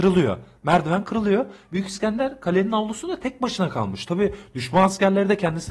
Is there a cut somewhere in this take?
no; 0 cuts

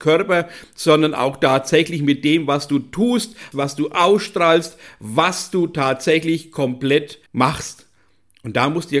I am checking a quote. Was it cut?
yes; 2 cuts; at 3.5 s, 7.3 s

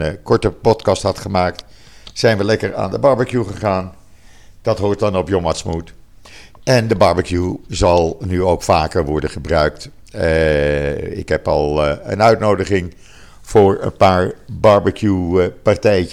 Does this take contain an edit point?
no; 0 cuts

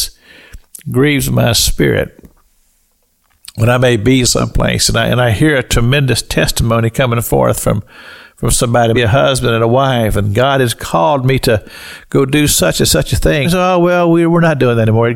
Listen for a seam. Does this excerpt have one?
yes; 2 cuts; at 8.9 s, 13.4 s

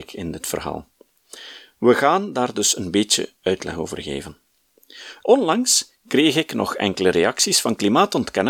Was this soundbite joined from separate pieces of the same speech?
yes; 1 cut; at 5.2 s

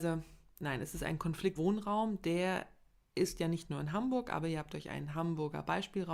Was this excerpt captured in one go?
no; 1 cut; at 1.6 s

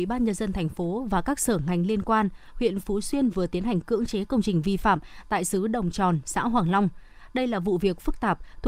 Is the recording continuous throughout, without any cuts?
yes; 0 cuts

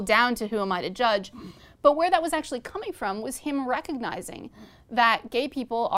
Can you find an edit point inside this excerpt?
no; 0 cuts

